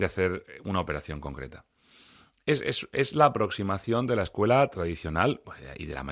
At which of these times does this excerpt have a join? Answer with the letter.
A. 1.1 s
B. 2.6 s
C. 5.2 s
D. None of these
D